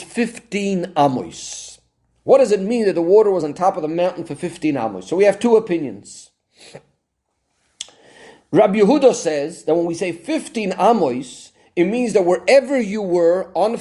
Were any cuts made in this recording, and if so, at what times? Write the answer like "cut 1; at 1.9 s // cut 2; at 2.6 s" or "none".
none